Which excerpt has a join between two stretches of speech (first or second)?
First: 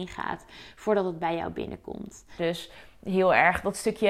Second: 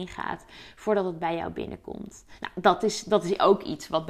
first